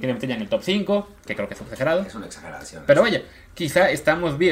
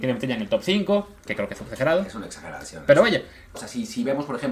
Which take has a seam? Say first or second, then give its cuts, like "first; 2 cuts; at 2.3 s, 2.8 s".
second; 1 cut; at 3.5 s